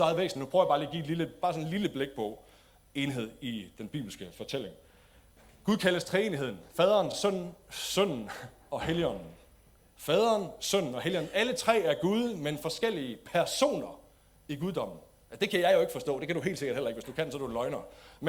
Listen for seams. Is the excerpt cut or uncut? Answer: uncut